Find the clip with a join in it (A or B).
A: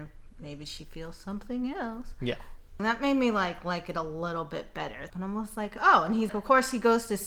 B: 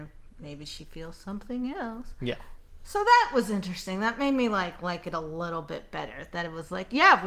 A